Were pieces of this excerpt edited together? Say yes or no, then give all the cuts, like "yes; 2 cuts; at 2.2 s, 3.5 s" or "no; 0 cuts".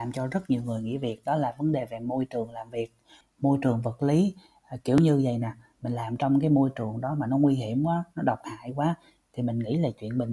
yes; 1 cut; at 3.2 s